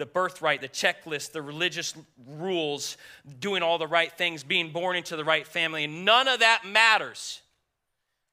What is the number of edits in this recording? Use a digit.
0